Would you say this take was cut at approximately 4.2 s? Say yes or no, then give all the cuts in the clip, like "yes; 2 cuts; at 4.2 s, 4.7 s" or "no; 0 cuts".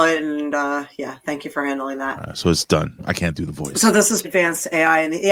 yes; 2 cuts; at 3.0 s, 4.2 s